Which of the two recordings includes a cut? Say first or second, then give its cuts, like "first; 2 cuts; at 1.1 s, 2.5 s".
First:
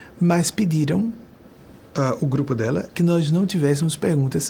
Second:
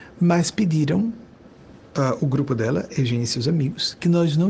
first; 1 cut; at 2.9 s